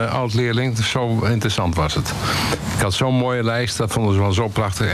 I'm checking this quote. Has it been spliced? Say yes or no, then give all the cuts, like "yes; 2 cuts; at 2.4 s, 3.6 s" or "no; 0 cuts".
no; 0 cuts